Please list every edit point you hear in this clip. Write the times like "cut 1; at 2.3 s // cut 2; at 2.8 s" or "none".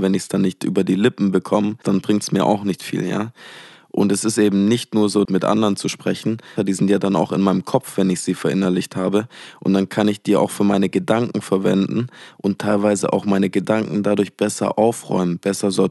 cut 1; at 1.8 s // cut 2; at 5.3 s // cut 3; at 6.6 s